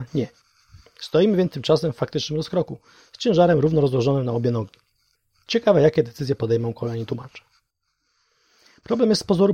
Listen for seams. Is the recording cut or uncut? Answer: uncut